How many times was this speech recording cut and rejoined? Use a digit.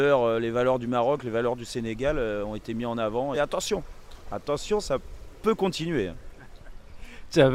1